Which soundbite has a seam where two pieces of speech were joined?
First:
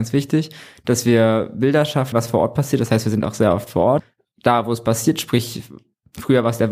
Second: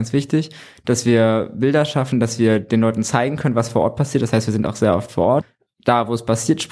first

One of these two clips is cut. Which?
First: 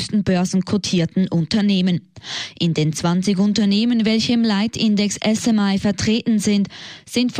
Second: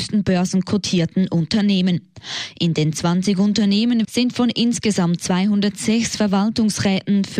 second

